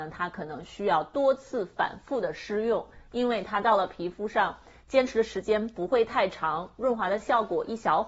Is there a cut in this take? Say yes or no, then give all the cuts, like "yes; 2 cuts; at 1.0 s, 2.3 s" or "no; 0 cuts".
no; 0 cuts